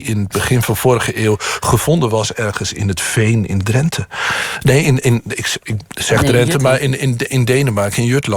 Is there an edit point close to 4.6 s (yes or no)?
no